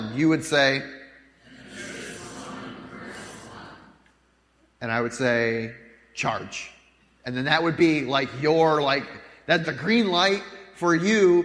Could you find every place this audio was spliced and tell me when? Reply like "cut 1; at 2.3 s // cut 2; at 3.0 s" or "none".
cut 1; at 9.6 s